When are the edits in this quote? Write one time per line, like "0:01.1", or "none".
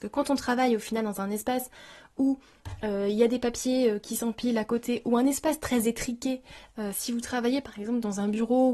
none